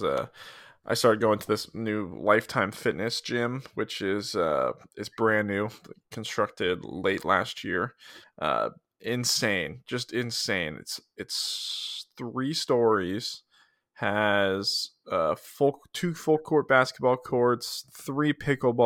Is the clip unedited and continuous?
yes; 0 cuts

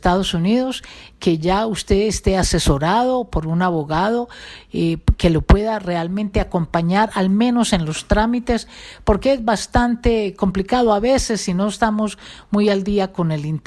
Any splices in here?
no; 0 cuts

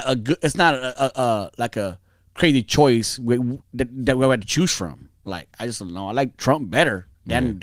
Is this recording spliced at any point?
no; 0 cuts

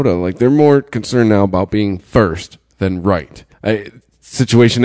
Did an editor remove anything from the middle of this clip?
yes; 1 cut; at 3.5 s

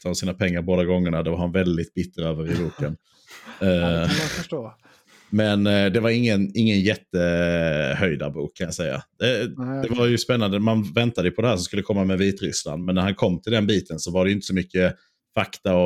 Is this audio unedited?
yes; 0 cuts

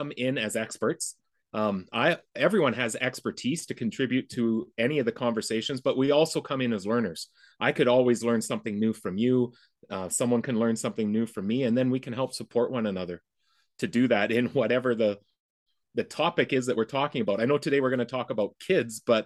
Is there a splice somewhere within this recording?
no; 0 cuts

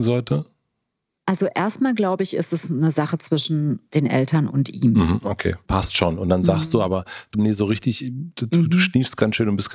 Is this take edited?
yes; 3 cuts; at 3.9 s, 5.7 s, 7.3 s

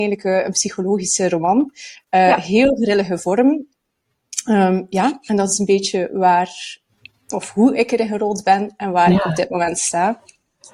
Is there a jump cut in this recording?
no; 0 cuts

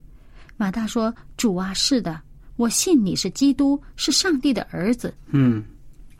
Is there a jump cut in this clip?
yes; 1 cut; at 5.2 s

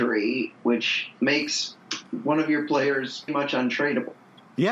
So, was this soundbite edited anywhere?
yes; 1 cut; at 3.3 s

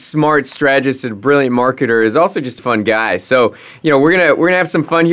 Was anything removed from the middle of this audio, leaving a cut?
yes; 1 cut; at 2.6 s

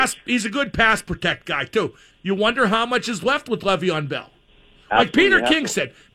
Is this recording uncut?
no; 1 cut; at 2.1 s

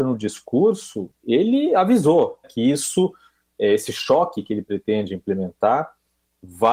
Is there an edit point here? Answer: yes; 1 cut; at 2.4 s

